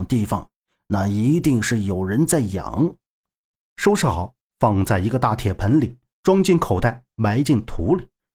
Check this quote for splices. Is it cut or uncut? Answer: cut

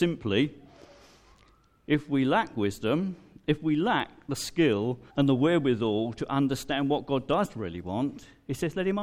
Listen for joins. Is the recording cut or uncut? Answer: cut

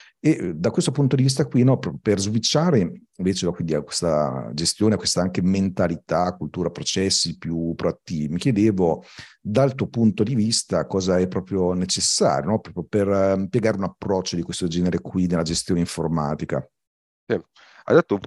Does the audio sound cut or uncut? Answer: uncut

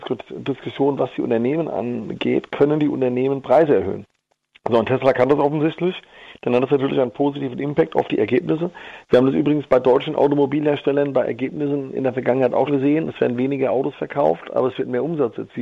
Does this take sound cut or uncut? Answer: cut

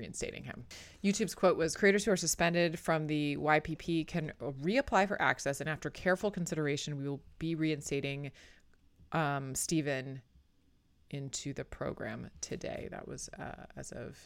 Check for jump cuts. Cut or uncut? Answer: uncut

